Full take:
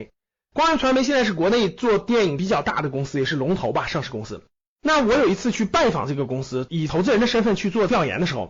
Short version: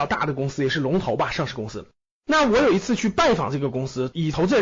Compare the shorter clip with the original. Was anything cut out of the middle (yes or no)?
no